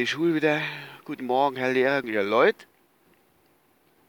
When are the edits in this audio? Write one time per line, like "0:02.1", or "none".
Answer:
0:02.0